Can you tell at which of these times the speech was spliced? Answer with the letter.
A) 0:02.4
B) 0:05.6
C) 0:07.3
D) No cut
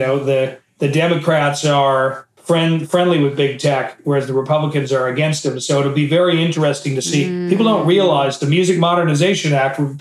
A